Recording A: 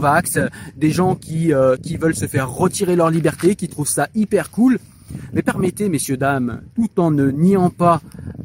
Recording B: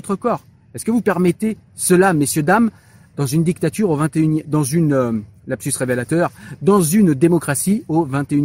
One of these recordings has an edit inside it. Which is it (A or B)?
A